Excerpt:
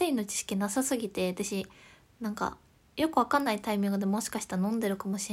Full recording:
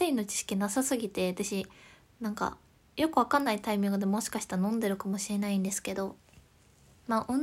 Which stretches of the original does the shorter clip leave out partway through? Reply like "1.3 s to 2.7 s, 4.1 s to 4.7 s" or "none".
none